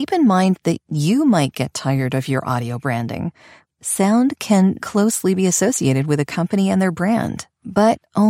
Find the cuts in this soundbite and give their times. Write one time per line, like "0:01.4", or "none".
0:03.6
0:04.8